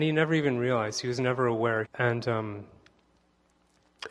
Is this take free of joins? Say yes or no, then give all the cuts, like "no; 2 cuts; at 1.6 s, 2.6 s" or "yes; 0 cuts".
no; 1 cut; at 1.8 s